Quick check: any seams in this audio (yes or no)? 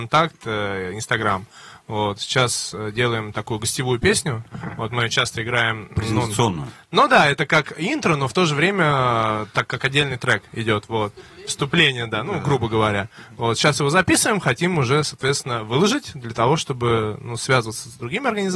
no